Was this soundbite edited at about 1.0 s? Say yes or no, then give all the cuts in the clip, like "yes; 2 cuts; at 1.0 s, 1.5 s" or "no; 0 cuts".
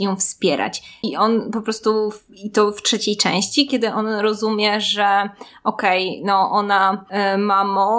yes; 1 cut; at 1.0 s